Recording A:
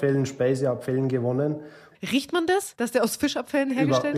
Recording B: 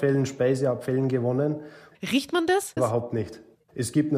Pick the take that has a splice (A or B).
B